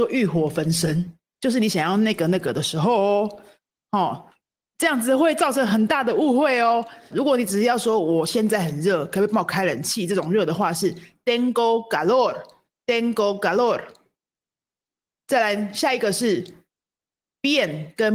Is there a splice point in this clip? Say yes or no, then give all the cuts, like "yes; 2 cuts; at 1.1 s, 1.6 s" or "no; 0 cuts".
yes; 1 cut; at 7.1 s